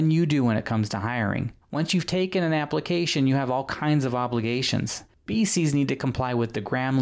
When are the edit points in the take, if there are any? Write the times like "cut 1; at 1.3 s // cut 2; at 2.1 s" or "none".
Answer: cut 1; at 1.6 s // cut 2; at 5.1 s